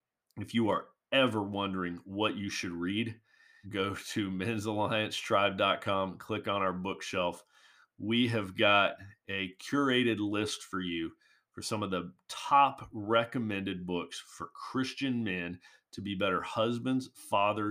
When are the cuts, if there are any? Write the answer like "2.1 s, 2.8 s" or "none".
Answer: 3.6 s